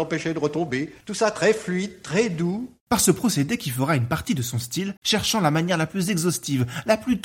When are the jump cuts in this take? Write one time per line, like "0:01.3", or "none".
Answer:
0:05.0